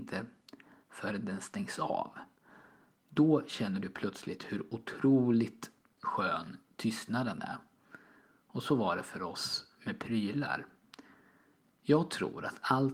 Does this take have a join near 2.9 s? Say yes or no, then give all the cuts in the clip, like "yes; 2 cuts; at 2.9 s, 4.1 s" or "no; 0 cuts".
no; 0 cuts